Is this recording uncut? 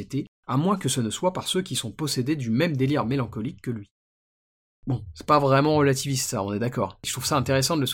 yes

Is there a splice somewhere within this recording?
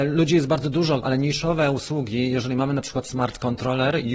yes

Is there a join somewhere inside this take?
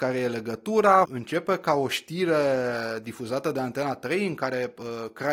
yes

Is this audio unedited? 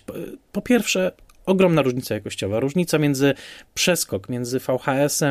yes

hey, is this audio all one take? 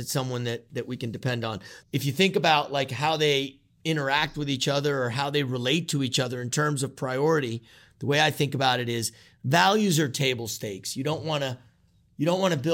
no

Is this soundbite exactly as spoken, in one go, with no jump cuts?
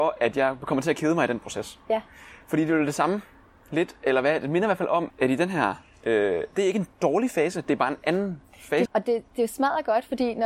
no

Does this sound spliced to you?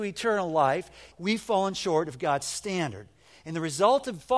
yes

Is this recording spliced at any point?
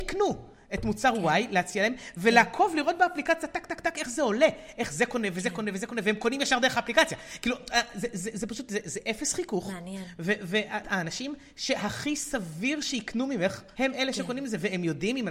yes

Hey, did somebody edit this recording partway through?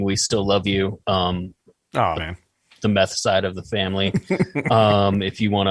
yes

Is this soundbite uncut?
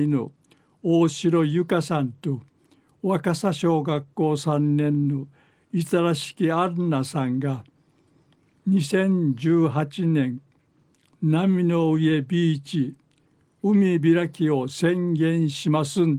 yes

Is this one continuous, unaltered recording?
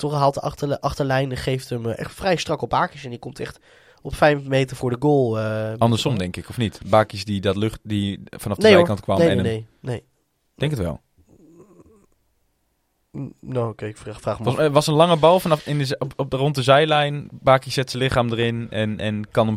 yes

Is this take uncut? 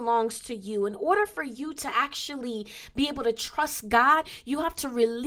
yes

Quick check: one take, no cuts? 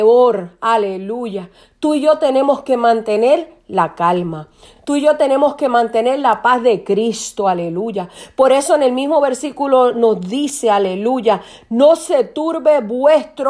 yes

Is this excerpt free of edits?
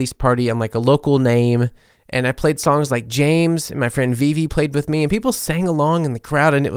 no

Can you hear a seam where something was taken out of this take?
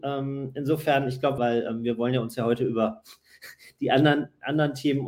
yes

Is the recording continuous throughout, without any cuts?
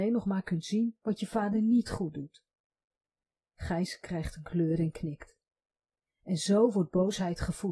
yes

